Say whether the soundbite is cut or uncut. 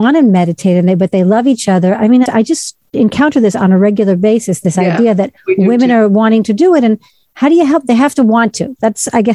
cut